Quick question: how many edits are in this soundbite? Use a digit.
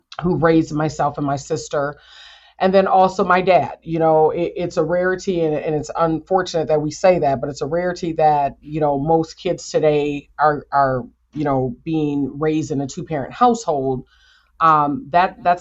0